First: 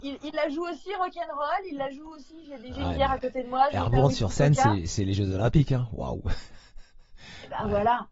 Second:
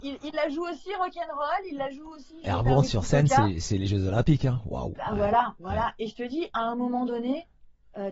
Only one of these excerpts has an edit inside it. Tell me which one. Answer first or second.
second